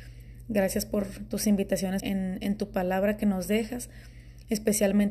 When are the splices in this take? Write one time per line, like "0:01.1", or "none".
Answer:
0:02.0